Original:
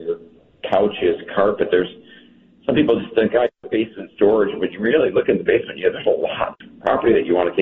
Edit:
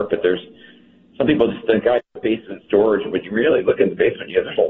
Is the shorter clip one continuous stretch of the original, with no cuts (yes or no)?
yes